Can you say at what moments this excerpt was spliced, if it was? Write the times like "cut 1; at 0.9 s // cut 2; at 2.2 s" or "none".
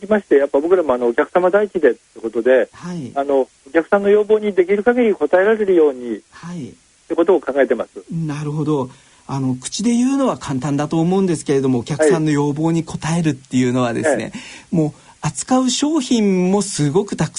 none